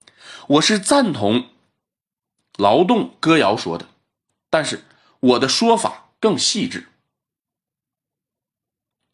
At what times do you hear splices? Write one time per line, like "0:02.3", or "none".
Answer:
none